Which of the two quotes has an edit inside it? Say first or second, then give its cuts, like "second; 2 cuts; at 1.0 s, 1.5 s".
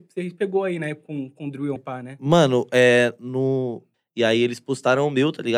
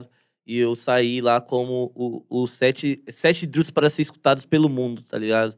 first; 2 cuts; at 1.8 s, 3.9 s